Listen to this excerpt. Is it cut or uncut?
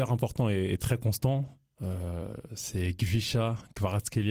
uncut